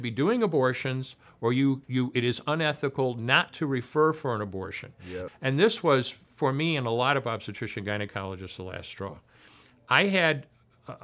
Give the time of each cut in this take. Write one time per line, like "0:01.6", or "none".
0:05.3

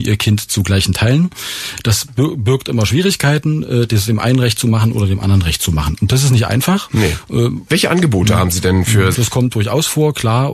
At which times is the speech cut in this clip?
0:07.7
0:09.1

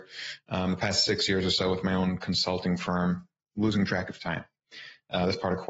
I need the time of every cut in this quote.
0:03.4

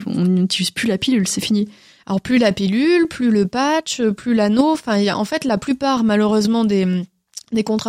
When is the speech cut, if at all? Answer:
none

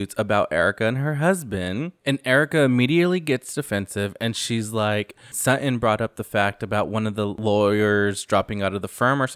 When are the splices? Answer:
0:05.3

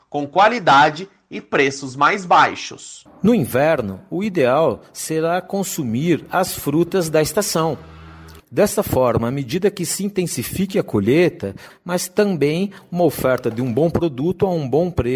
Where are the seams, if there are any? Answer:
0:08.4
0:11.7

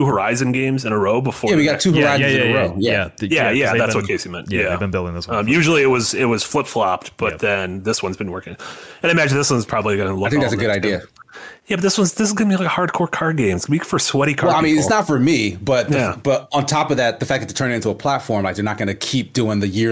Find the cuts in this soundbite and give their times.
none

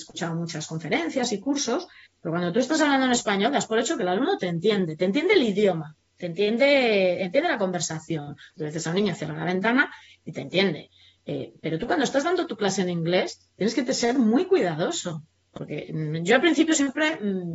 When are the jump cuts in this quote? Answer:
0:08.6

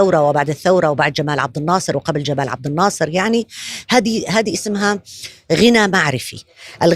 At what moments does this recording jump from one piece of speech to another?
none

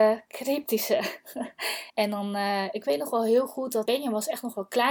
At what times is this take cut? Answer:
0:01.9
0:03.9

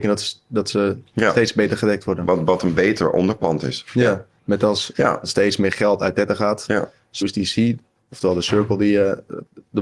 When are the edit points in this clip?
0:04.9
0:07.2

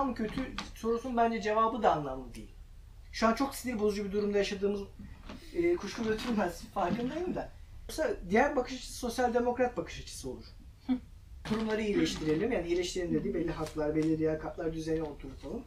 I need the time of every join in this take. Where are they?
0:07.9
0:11.5

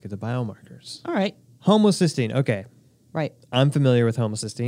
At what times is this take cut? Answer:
0:01.5

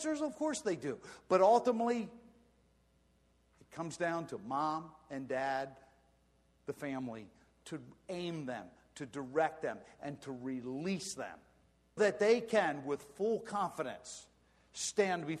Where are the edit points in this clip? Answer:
0:12.0

